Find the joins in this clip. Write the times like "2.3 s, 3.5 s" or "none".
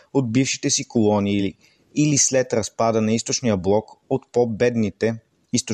none